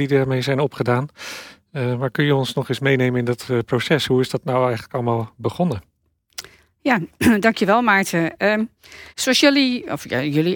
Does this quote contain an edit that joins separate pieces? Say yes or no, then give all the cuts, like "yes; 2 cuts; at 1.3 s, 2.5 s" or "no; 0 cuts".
yes; 1 cut; at 9.1 s